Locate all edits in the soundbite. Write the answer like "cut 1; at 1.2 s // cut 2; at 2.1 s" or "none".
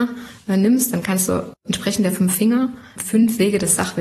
cut 1; at 1.5 s // cut 2; at 3.0 s